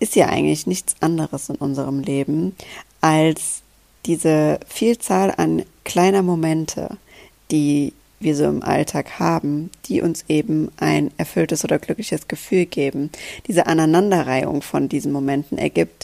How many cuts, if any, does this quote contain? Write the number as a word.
zero